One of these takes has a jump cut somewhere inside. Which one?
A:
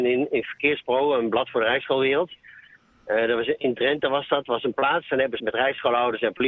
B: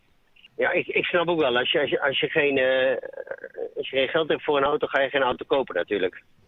A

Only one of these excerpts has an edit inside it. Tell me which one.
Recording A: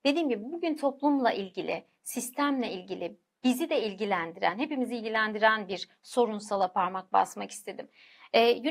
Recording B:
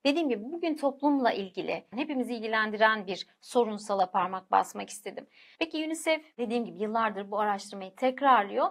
B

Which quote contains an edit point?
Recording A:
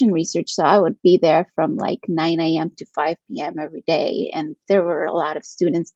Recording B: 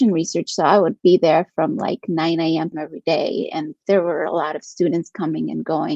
B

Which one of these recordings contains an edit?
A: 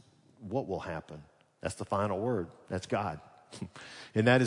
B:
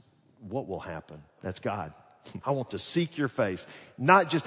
B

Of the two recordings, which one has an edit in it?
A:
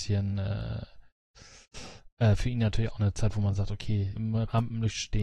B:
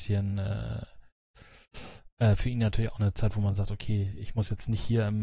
A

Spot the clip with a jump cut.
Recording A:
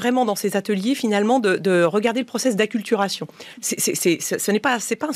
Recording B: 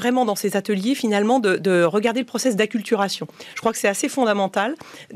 A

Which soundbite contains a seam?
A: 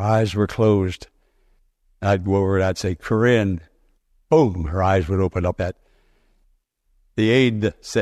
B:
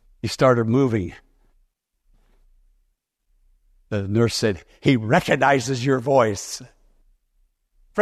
A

